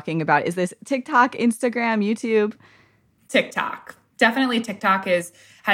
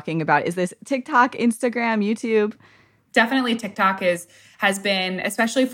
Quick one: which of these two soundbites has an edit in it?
second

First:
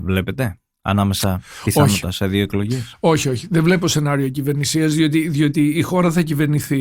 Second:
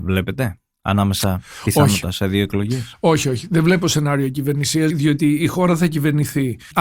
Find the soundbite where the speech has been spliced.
second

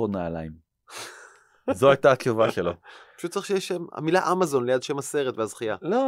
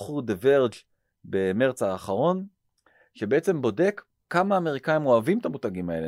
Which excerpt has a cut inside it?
second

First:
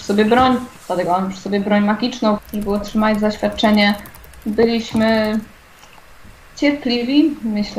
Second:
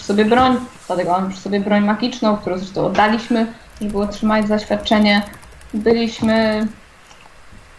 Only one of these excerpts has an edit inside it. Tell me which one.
first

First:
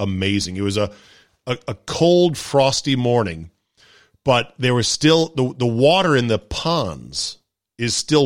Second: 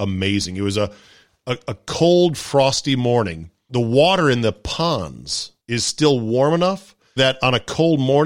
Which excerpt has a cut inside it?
second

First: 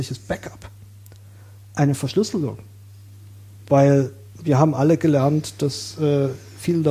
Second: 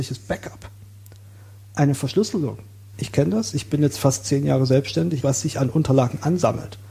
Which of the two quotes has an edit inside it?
second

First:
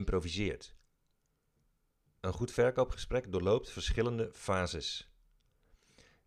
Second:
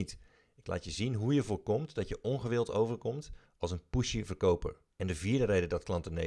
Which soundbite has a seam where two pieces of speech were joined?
second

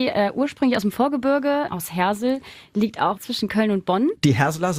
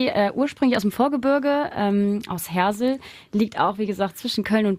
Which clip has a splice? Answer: first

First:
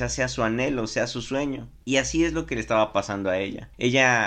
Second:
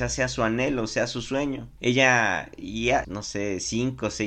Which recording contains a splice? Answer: second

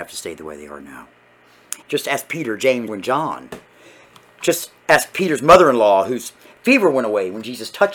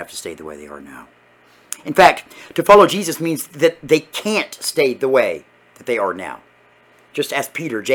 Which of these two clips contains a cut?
first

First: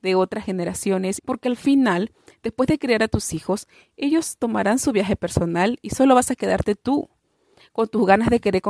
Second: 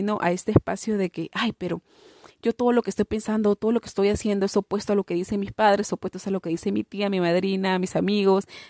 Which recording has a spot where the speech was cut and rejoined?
first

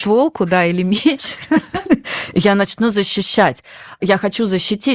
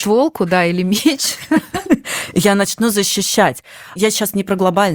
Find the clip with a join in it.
second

